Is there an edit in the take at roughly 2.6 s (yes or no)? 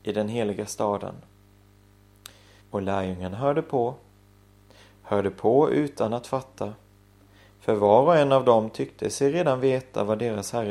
yes